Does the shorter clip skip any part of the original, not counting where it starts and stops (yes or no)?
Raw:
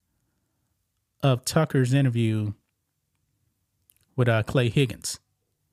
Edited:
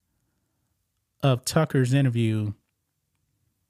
no